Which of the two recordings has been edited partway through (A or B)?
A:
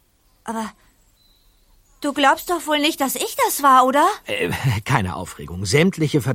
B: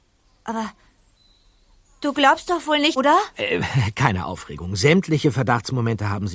B